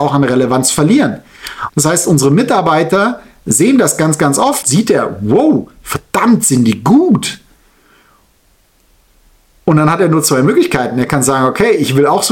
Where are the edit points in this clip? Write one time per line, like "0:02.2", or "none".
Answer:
0:01.7
0:04.6